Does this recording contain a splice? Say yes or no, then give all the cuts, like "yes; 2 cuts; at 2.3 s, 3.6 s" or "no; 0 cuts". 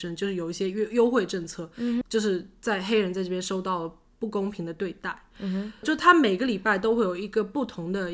yes; 2 cuts; at 2.0 s, 5.8 s